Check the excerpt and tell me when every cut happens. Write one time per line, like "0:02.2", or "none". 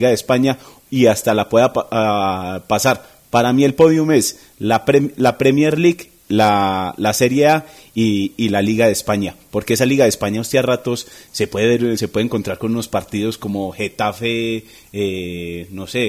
none